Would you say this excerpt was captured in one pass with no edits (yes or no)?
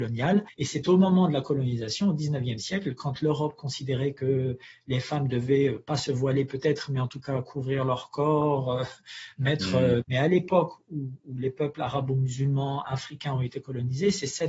no